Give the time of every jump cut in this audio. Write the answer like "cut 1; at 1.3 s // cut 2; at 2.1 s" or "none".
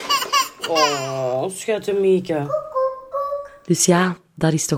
cut 1; at 3.1 s

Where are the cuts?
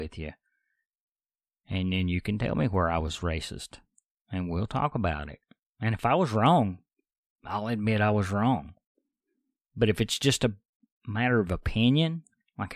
none

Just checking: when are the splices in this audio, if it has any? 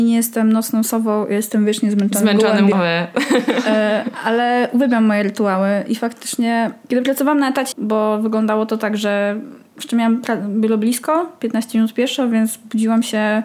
cut 1; at 2.7 s // cut 2; at 7.7 s

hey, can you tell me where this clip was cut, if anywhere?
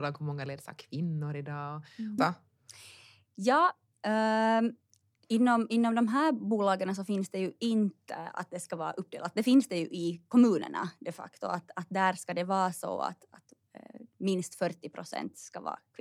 cut 1; at 2.2 s

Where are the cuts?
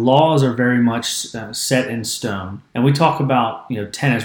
cut 1; at 2.7 s

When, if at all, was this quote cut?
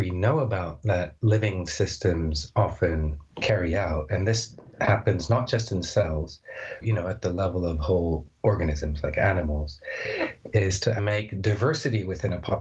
cut 1; at 6.8 s // cut 2; at 11.0 s

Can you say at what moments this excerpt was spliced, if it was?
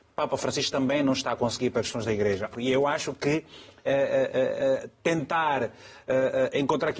cut 1; at 2.5 s

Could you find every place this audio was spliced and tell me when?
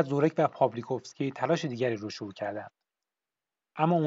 none

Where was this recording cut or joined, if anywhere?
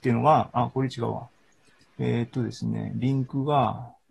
none

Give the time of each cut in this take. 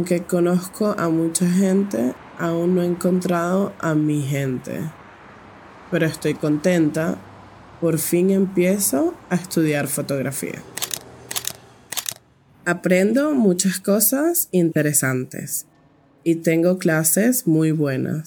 none

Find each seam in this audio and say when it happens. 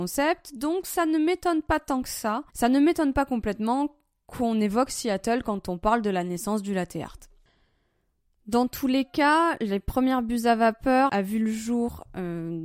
cut 1; at 2.5 s // cut 2; at 11.1 s

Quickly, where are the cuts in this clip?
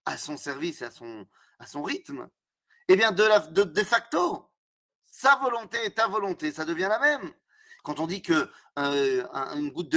cut 1; at 7.8 s

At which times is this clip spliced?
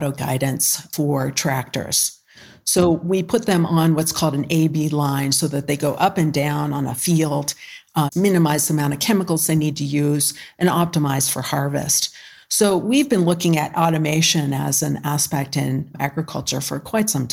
cut 1; at 8.1 s

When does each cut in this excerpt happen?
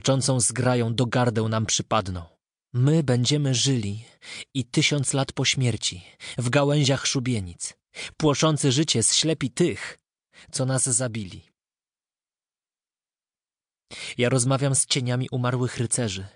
none

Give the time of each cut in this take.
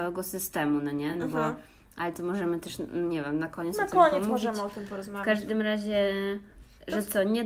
none

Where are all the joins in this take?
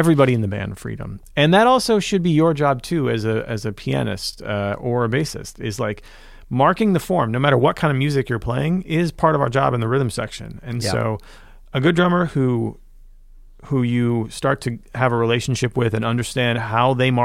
none

